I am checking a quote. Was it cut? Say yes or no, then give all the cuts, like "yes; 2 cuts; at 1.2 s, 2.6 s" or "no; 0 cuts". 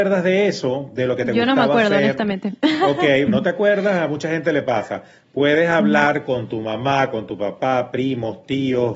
yes; 1 cut; at 3.3 s